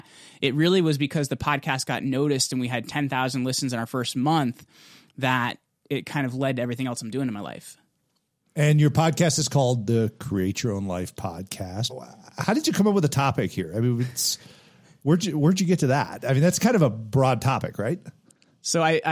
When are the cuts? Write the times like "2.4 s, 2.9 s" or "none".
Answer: 11.9 s